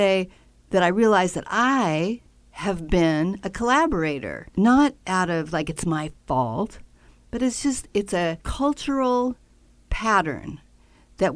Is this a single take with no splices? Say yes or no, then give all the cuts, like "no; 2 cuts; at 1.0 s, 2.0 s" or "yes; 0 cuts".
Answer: no; 2 cuts; at 4.5 s, 8.4 s